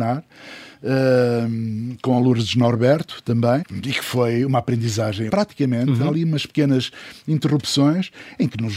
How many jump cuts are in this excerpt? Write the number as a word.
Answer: two